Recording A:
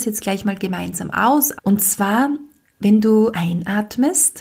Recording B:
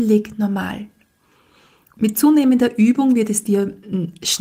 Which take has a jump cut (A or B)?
A